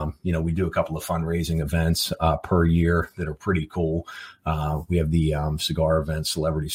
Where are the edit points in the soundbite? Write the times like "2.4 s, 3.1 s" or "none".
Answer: none